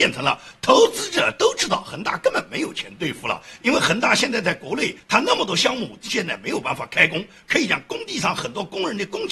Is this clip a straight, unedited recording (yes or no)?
no